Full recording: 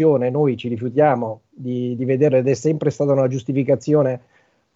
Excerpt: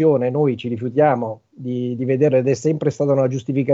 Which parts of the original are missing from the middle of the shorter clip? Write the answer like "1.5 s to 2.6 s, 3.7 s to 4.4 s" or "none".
none